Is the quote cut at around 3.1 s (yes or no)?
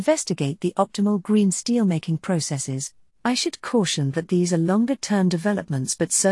yes